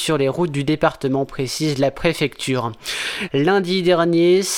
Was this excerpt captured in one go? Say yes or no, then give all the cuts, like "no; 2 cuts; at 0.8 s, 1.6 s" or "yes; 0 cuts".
no; 1 cut; at 3.3 s